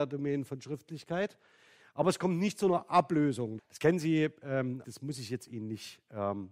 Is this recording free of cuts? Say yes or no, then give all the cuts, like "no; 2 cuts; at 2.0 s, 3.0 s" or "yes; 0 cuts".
no; 2 cuts; at 3.6 s, 4.8 s